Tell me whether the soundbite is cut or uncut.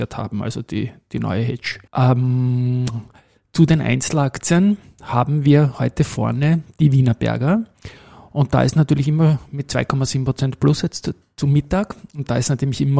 cut